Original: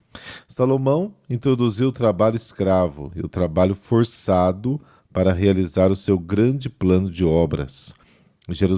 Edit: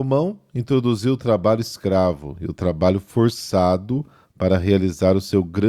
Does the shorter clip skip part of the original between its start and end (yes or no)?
no